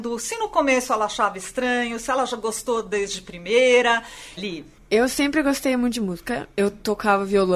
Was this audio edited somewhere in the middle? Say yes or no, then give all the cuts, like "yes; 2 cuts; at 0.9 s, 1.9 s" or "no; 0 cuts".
yes; 1 cut; at 4.4 s